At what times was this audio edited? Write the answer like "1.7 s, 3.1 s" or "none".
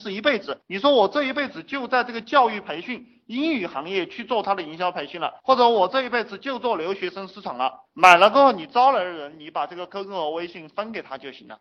7.9 s